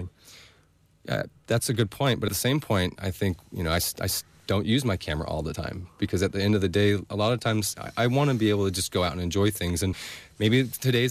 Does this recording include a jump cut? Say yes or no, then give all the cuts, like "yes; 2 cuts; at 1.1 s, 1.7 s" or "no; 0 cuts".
no; 0 cuts